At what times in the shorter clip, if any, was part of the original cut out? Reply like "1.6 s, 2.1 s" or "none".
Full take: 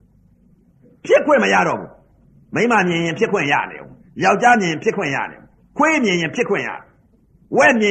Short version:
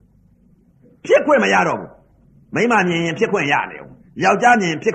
none

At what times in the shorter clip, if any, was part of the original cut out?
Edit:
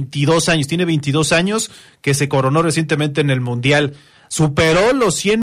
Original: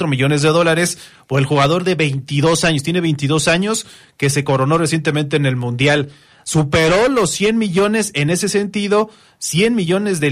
none

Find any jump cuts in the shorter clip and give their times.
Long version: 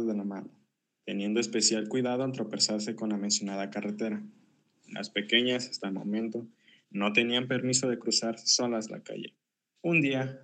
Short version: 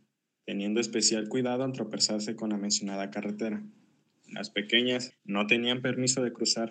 5.1 s

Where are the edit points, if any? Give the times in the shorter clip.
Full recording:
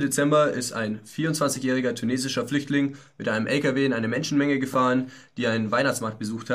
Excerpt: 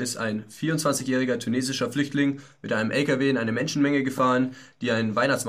none

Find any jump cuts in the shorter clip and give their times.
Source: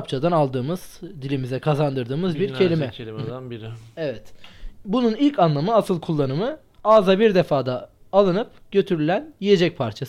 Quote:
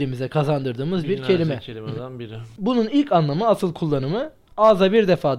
2.6 s

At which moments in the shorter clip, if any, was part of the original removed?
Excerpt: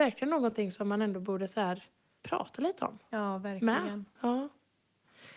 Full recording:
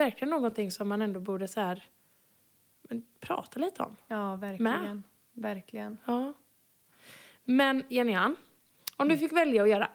2.2 s, 4.2 s

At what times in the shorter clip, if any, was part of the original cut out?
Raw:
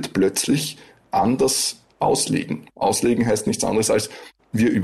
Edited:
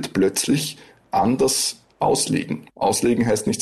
none

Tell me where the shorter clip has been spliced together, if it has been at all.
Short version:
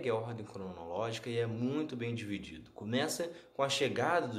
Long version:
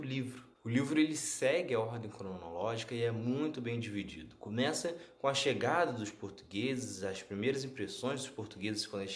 none

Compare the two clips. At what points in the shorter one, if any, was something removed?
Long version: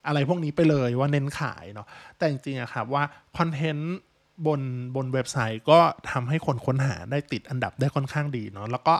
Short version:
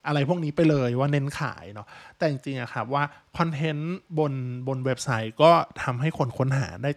4.1 s

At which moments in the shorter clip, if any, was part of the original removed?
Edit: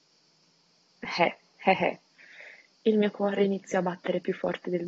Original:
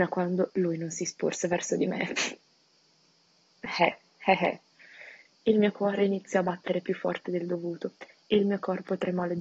none

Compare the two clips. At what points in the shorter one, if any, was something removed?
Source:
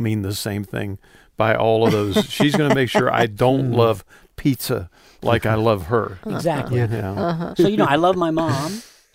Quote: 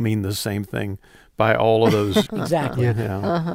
2.3 s

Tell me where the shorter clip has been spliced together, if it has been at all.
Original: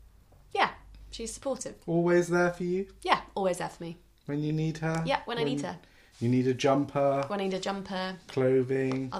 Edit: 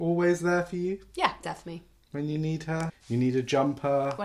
1.4 s, 2.9 s

